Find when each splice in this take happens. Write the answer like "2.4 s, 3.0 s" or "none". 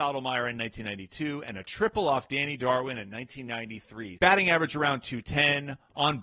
4.2 s